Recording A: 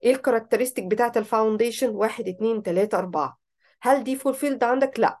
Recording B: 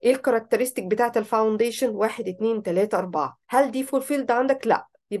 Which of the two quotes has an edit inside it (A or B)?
B